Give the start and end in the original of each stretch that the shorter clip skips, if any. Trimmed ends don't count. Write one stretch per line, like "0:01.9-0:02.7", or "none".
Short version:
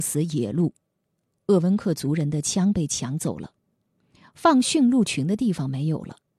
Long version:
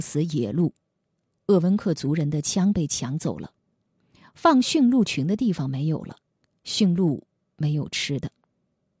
none